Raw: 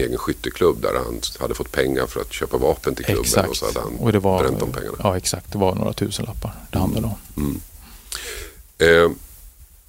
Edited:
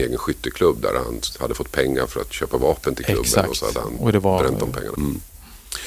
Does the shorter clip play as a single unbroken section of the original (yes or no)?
no